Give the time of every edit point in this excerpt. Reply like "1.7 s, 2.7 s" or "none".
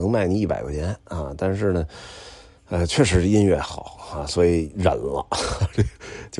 none